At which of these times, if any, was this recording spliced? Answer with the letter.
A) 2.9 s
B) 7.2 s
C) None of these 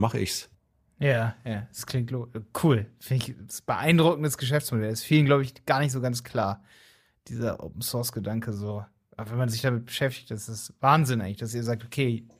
C